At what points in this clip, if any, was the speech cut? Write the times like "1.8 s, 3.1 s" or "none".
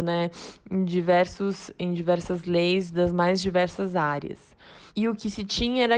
4.9 s